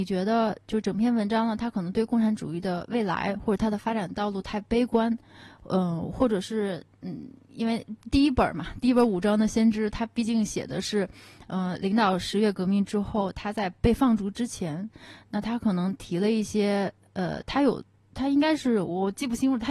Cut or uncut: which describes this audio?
uncut